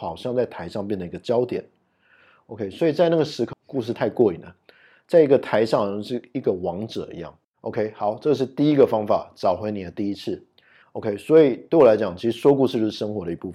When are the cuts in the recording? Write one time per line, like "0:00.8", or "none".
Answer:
0:03.5
0:07.4
0:10.8